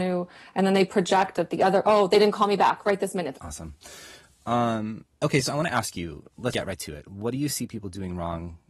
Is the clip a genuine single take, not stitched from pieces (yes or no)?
no